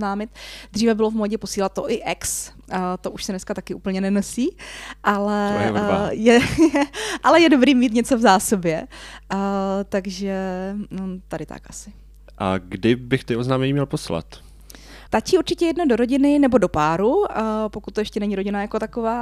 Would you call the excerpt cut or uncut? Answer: cut